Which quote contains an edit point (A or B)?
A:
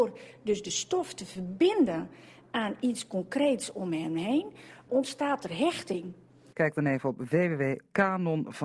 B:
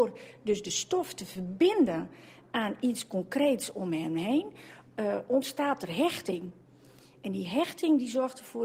A